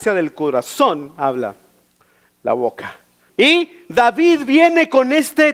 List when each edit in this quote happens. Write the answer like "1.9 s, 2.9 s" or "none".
3.3 s